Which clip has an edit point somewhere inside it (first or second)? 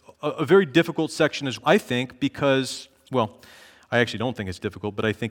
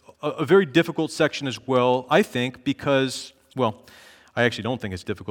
first